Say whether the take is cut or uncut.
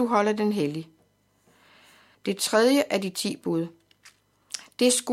cut